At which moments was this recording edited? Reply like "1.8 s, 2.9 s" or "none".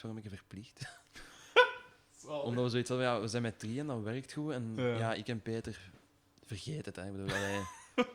none